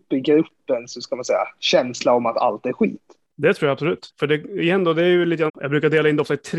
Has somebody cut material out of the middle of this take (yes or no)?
yes